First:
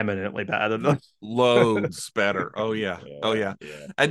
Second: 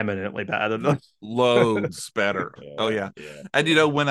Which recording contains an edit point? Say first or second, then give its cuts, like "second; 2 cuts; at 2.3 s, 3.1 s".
second; 1 cut; at 2.6 s